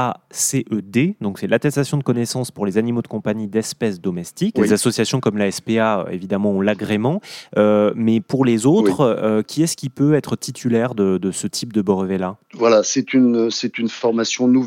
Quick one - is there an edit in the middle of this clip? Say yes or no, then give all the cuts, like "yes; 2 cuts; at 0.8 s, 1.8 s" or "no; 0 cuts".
yes; 1 cut; at 4.5 s